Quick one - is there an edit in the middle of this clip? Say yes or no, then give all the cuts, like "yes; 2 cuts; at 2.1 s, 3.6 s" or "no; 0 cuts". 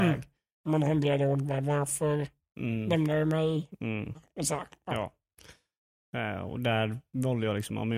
yes; 1 cut; at 4.1 s